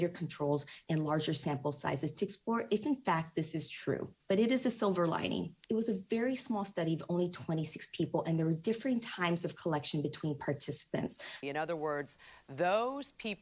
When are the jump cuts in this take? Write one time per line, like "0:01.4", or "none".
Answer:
0:05.7
0:11.4